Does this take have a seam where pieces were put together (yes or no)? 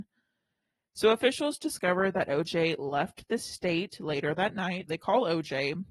yes